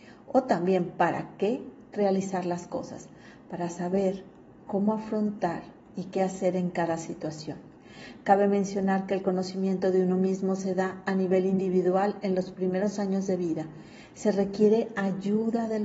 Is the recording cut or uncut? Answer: uncut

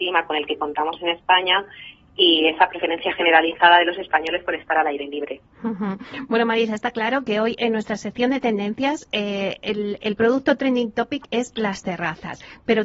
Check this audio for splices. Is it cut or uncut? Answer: uncut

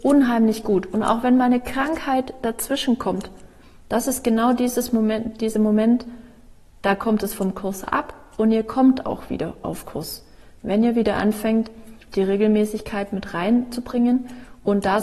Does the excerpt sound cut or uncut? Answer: uncut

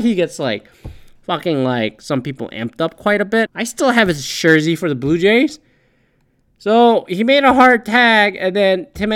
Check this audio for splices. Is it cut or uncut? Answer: cut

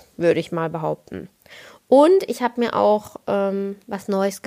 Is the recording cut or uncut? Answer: uncut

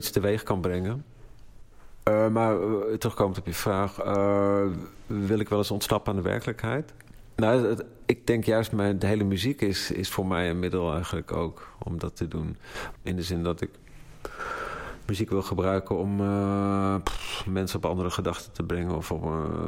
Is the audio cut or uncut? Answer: cut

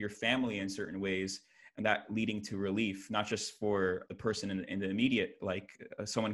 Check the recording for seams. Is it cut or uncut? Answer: cut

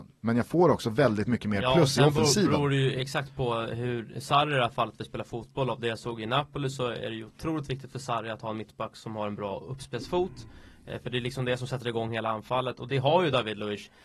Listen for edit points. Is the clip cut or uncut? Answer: uncut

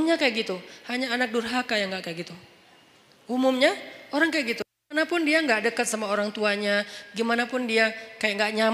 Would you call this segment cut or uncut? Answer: uncut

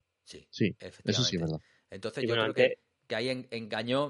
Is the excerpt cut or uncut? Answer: uncut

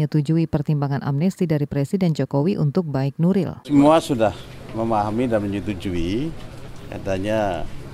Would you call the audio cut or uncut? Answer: uncut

